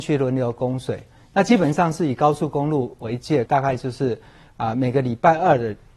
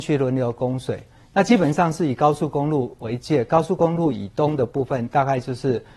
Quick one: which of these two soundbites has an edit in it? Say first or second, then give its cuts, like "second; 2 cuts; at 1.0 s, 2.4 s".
first; 1 cut; at 3.5 s